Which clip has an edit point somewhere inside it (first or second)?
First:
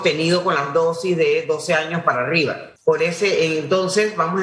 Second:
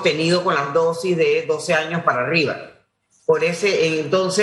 first